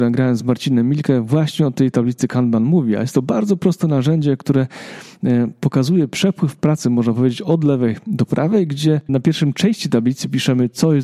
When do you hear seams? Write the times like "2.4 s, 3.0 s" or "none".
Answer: 9.1 s